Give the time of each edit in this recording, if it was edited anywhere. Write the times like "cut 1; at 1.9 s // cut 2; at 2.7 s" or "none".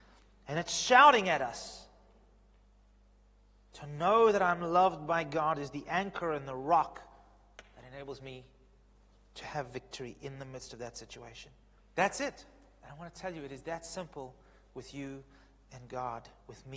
cut 1; at 11.8 s